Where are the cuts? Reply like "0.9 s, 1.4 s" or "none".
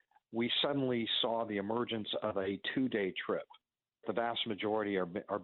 4.0 s